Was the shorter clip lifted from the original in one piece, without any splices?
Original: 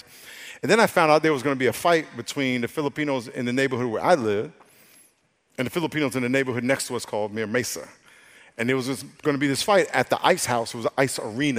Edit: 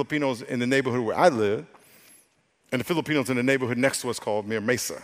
yes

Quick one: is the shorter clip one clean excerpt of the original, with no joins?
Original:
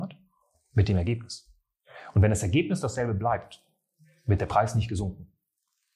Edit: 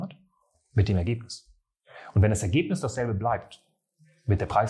yes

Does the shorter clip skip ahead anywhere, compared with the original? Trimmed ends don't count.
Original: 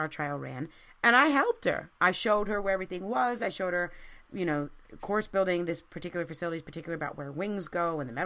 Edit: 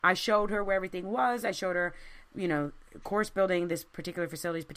no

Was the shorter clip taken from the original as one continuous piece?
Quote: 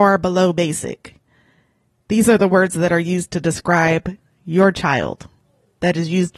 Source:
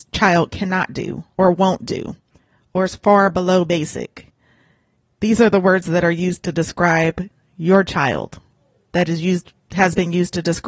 yes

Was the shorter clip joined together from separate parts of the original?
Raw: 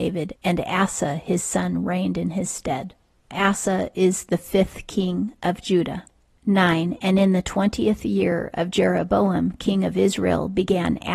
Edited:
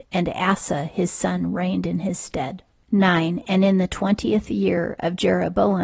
yes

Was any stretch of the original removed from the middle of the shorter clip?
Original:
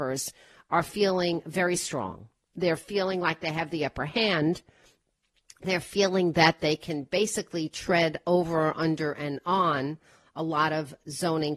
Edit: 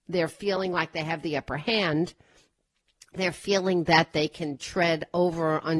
yes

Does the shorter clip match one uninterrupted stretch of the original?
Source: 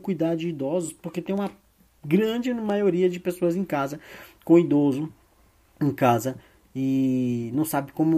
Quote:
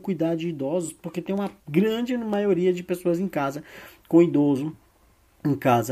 no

